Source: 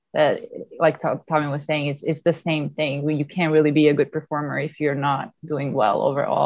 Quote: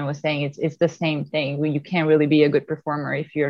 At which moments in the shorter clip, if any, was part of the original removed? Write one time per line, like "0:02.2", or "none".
none